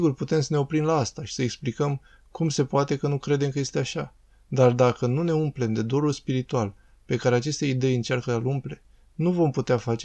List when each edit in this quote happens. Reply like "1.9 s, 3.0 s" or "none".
none

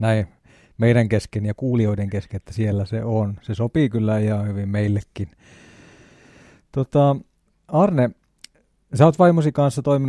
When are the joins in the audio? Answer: none

